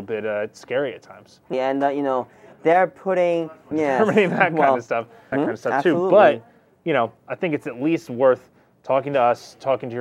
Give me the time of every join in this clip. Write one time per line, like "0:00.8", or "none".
0:01.5
0:03.7
0:05.3